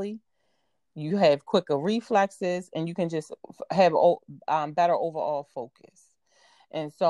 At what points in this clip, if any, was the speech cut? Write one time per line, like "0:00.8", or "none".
none